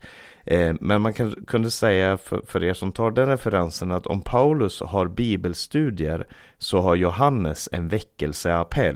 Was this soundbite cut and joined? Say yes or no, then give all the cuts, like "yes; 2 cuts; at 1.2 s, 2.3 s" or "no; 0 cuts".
no; 0 cuts